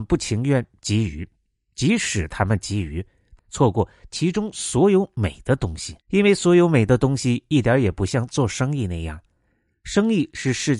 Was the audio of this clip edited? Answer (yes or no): yes